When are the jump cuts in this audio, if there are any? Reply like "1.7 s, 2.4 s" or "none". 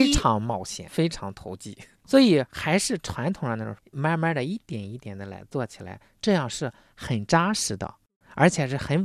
2.0 s